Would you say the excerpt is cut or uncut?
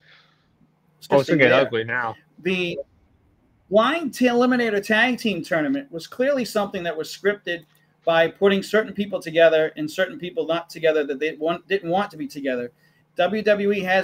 cut